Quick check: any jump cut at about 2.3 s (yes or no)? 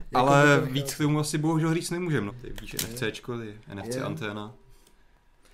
yes